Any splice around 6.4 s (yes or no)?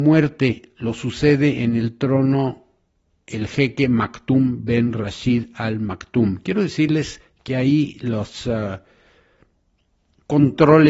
no